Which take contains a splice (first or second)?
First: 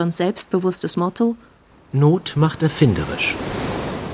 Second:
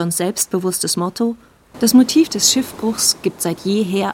second